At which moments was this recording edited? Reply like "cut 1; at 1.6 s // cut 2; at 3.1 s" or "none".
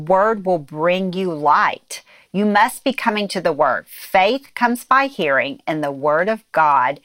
none